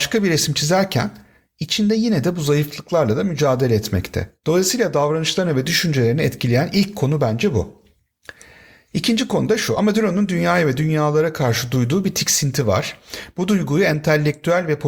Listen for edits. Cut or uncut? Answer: uncut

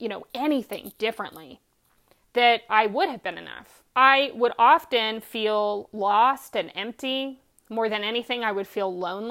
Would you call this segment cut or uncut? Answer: cut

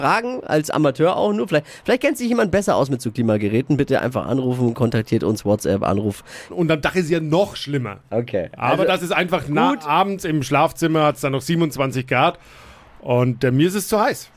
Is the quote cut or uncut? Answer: cut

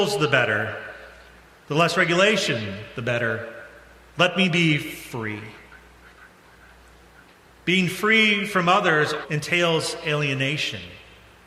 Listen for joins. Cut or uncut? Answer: cut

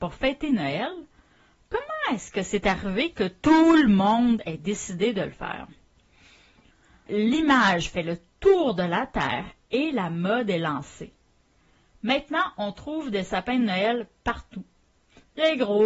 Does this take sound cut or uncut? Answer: cut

